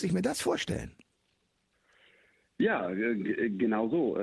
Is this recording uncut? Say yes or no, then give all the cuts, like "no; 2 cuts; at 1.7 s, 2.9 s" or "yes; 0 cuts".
yes; 0 cuts